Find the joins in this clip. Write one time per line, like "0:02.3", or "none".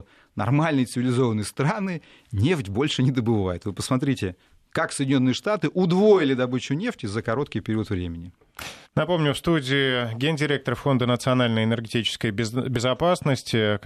0:08.9